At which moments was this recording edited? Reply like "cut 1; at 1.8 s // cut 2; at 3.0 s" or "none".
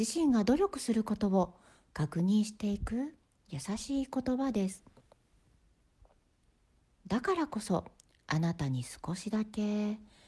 cut 1; at 6.9 s